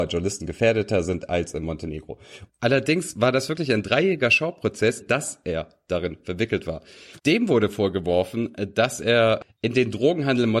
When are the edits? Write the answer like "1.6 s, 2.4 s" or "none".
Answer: 2.5 s, 5.0 s, 7.2 s